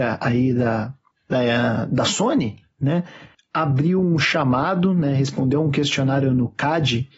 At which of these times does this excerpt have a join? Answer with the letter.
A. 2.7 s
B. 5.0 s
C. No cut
C